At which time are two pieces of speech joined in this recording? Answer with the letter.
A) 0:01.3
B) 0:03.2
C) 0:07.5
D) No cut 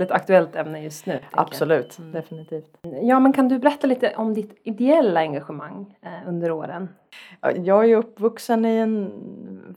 C